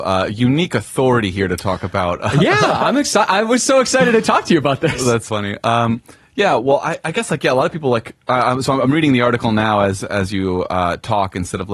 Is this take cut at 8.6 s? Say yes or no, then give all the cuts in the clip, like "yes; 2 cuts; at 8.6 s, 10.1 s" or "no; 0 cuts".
no; 1 cut; at 5.3 s